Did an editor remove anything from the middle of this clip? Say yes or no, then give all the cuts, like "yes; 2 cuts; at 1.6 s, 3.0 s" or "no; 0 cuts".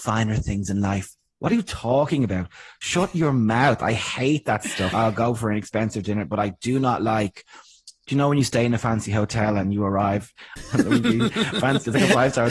yes; 2 cuts; at 4.9 s, 10.6 s